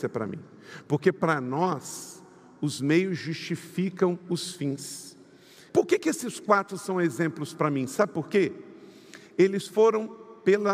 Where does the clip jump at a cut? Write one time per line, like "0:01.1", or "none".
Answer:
0:05.7